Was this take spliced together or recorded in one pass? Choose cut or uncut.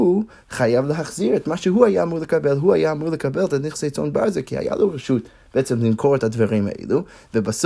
uncut